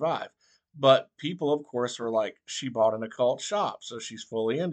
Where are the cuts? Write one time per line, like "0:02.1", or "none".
none